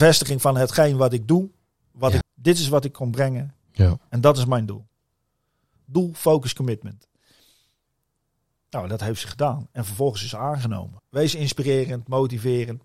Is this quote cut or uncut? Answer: cut